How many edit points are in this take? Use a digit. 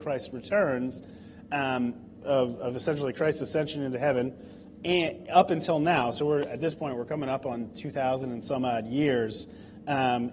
1